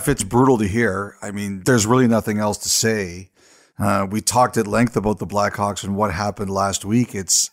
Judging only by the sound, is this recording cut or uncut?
uncut